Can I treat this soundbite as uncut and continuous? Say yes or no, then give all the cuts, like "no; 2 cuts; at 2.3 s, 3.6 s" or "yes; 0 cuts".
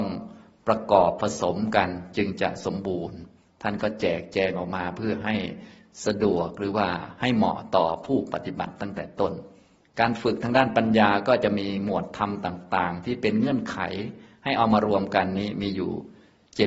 yes; 0 cuts